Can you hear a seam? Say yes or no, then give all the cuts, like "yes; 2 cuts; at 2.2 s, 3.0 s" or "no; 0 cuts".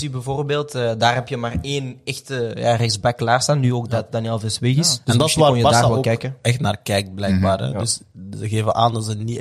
no; 0 cuts